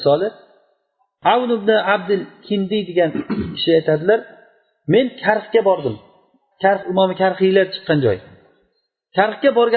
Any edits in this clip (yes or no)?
yes